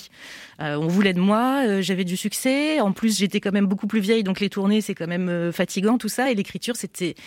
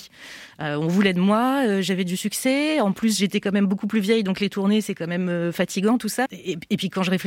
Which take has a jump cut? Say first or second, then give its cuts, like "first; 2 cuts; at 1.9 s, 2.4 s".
second; 1 cut; at 6.3 s